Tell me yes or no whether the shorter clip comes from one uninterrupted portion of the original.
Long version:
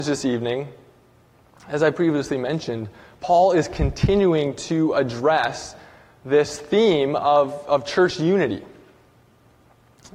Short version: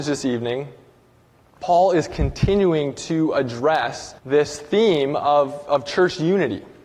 no